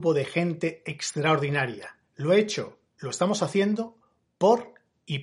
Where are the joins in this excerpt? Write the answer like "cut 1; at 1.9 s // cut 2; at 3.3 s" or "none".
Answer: none